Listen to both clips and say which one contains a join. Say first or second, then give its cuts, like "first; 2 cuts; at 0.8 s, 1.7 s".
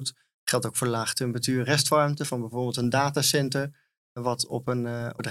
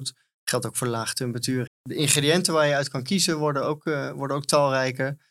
second; 1 cut; at 1.7 s